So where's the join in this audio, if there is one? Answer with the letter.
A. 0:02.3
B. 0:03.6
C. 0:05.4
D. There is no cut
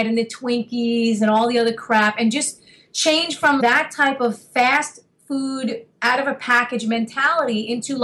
B